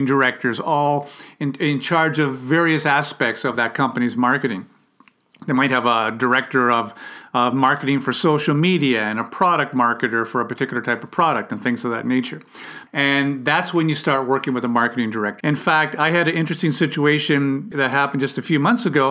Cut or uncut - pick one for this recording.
cut